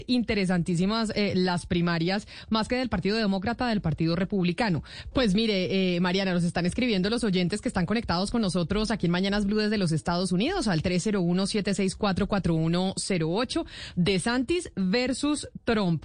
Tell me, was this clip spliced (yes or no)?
yes